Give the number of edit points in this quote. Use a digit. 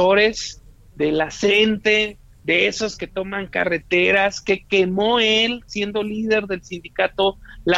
0